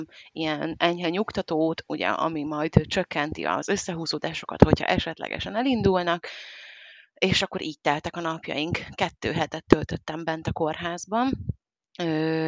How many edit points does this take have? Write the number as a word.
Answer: zero